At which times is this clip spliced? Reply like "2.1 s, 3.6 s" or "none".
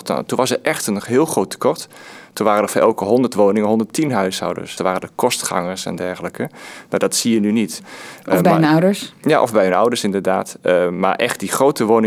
4.8 s, 7.8 s